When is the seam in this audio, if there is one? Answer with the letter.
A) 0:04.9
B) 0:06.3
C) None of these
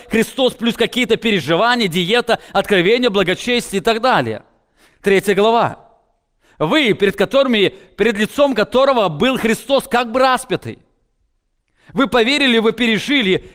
A